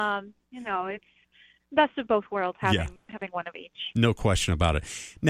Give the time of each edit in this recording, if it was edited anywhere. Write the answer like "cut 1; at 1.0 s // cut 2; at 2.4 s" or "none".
none